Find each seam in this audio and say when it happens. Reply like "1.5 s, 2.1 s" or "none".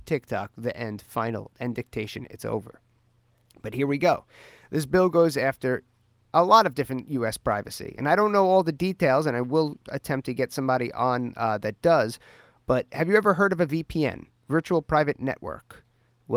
none